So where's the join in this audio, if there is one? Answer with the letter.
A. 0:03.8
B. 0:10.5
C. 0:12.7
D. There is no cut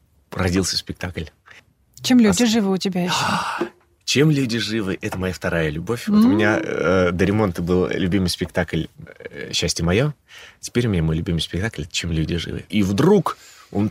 C